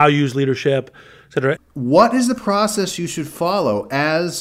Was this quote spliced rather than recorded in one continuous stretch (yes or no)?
yes